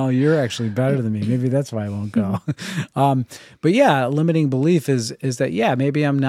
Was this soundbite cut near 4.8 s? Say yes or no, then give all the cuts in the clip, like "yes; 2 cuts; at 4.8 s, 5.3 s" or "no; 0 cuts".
no; 0 cuts